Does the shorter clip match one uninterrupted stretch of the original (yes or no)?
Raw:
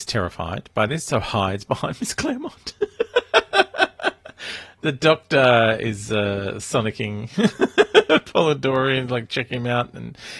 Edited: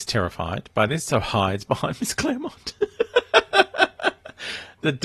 yes